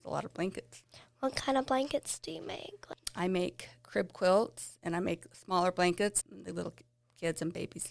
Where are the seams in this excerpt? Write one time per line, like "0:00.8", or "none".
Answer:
0:06.2